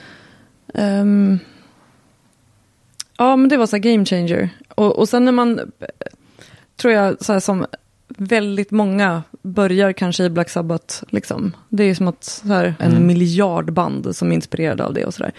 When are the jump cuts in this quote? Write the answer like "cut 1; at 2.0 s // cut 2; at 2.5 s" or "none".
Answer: cut 1; at 11.1 s // cut 2; at 12.8 s